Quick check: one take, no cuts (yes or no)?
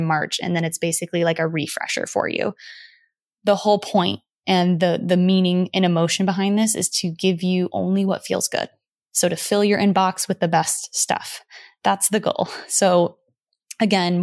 yes